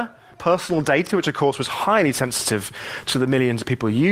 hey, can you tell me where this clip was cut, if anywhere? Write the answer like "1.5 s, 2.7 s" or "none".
none